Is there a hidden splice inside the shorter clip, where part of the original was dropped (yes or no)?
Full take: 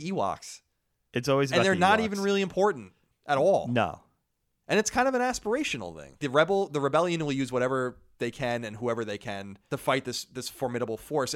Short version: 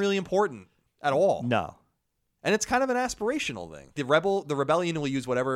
no